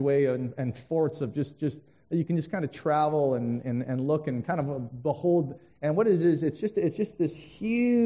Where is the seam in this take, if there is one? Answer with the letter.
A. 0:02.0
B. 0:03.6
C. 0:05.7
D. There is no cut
C